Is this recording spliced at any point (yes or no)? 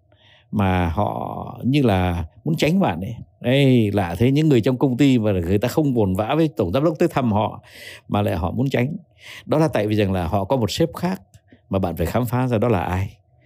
no